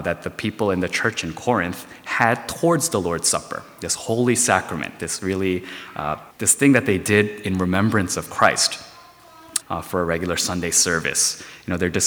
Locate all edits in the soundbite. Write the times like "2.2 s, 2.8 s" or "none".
6.3 s, 9.6 s